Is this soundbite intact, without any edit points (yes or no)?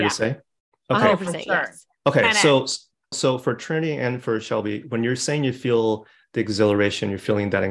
no